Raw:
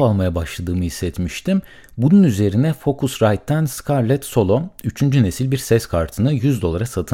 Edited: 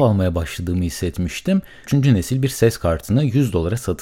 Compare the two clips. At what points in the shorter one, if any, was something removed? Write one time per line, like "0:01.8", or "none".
0:01.9